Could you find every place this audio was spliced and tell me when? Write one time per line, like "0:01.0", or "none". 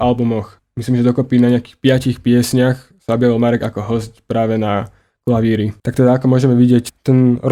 0:05.8